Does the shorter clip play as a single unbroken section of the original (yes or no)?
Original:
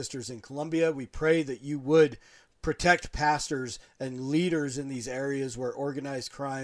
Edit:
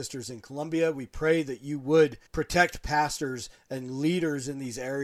no